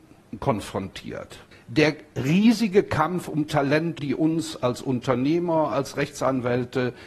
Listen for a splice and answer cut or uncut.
cut